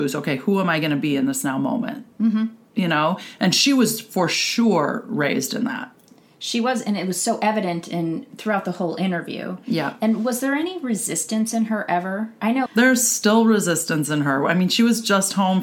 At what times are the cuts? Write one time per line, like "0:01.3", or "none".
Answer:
0:08.3
0:12.7